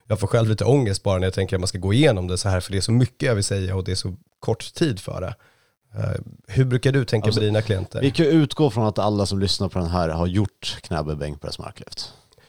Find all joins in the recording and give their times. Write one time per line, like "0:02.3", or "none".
none